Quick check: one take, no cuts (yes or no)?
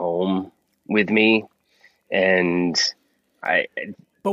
yes